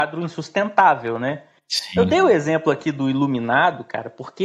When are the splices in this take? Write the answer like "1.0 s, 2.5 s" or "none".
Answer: none